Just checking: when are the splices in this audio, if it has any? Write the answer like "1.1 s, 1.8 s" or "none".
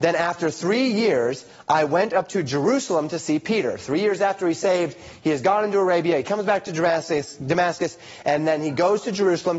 none